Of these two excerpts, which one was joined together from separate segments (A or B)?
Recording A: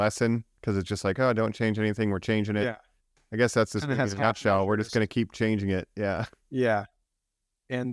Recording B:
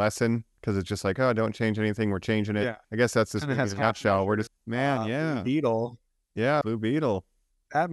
B